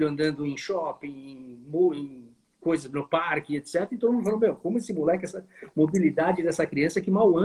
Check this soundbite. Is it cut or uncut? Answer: uncut